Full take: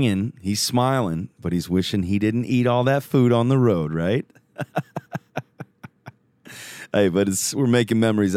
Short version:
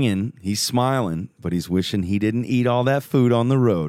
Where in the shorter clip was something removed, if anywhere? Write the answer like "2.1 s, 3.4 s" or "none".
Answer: none